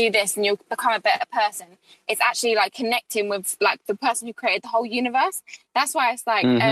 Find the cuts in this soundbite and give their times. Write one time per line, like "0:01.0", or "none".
none